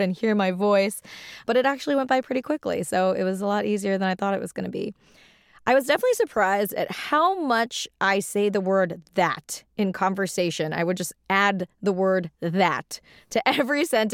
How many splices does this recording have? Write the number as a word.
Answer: zero